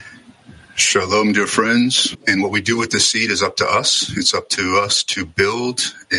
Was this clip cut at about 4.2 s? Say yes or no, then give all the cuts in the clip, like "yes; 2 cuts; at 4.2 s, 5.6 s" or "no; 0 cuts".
no; 1 cut; at 2.1 s